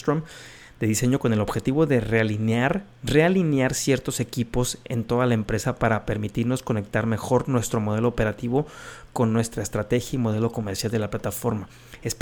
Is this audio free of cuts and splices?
yes; 0 cuts

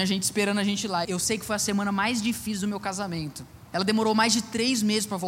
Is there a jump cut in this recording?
yes; 2 cuts; at 1.0 s, 3.7 s

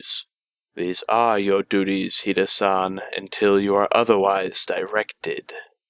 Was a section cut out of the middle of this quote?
no; 0 cuts

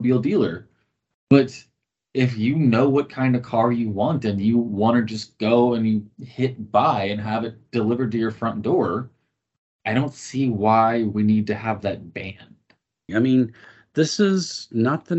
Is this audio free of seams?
no; 1 cut; at 13.1 s

